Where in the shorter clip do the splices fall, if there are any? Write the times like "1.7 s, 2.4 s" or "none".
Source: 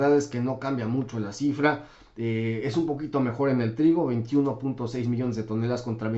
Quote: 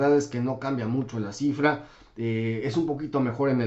none

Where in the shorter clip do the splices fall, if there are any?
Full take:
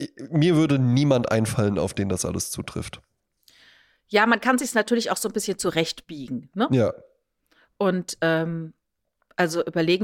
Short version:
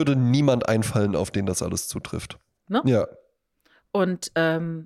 2.6 s

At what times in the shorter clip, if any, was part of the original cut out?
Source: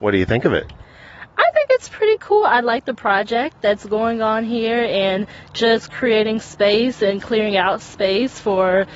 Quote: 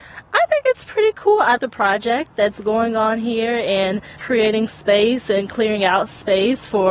1.6 s, 4.2 s

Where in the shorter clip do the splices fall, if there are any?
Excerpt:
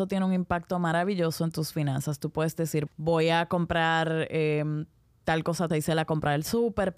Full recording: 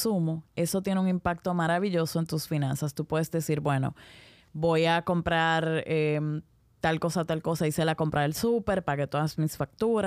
2.9 s, 5.7 s

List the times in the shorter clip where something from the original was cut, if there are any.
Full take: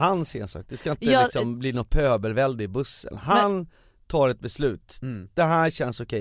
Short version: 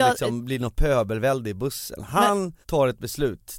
2.6 s

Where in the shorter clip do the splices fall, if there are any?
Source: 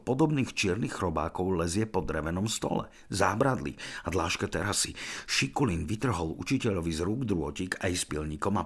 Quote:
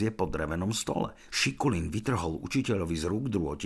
1.3 s

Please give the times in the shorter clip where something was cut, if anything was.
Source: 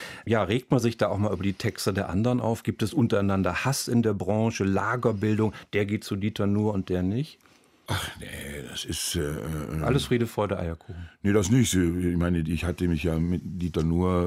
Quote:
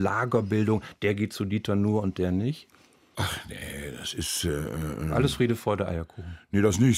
none

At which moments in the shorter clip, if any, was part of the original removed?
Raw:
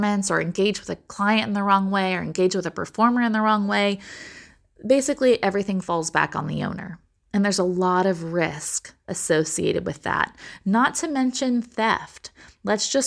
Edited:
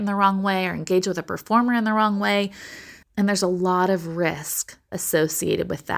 3.0 s

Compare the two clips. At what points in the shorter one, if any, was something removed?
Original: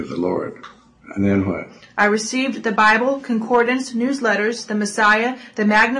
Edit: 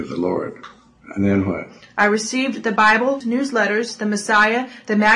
3.2 s

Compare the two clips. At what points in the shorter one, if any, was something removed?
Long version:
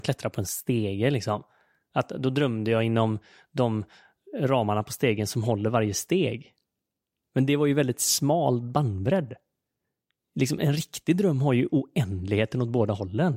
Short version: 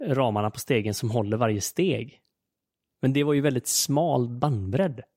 none

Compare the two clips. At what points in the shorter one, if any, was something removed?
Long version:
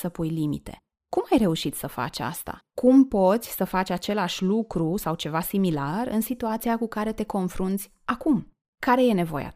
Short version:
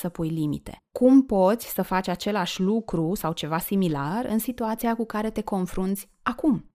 0.9 s

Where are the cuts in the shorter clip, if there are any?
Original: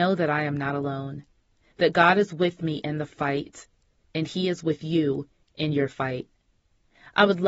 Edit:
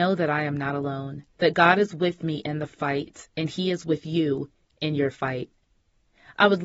1.3 s, 3.3 s

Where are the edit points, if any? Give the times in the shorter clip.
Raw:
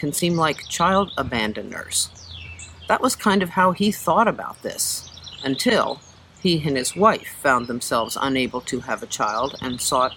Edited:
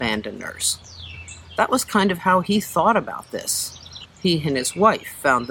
4.1 s

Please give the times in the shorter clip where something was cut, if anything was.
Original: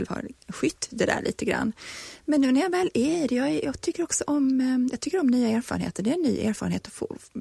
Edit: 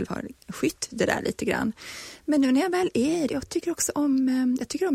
3.3 s

